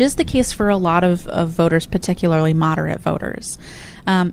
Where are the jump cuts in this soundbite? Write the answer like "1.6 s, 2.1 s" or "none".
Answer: none